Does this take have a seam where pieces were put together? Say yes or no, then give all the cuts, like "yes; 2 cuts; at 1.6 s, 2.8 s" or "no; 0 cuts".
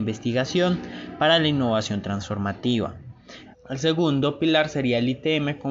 yes; 1 cut; at 3.5 s